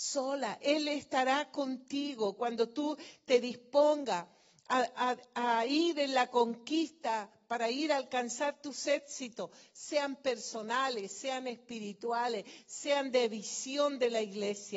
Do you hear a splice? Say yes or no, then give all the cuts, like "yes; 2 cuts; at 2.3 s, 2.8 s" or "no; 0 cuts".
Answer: no; 0 cuts